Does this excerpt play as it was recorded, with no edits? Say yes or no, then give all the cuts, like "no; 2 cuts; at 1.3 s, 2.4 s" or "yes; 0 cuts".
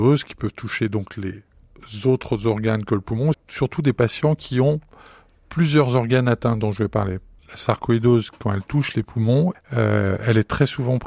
no; 3 cuts; at 3.3 s, 7.4 s, 9.5 s